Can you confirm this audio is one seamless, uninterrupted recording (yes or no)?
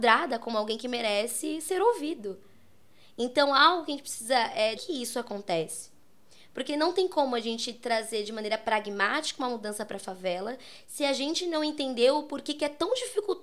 no